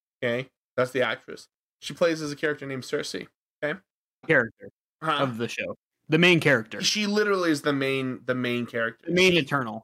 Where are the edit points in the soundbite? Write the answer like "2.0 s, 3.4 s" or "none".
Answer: 4.2 s